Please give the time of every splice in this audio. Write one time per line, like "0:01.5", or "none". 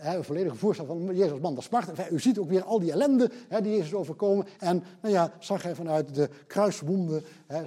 0:04.6